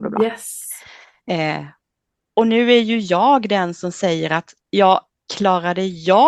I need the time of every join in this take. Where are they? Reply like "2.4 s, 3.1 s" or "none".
none